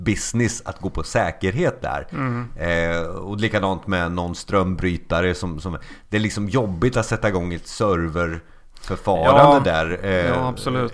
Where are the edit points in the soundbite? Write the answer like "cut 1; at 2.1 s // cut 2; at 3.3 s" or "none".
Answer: none